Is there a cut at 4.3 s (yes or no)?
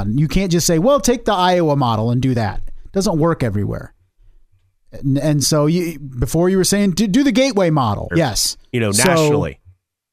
no